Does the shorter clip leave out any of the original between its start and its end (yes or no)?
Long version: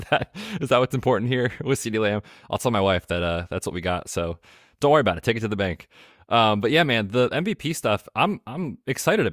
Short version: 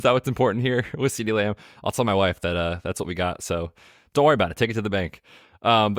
no